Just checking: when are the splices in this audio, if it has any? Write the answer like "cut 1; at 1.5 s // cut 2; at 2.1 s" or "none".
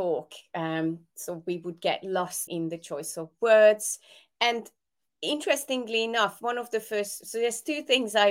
cut 1; at 2.5 s